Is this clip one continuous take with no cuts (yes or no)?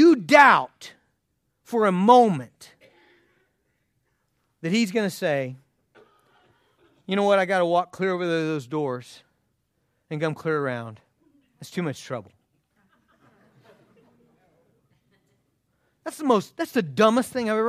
yes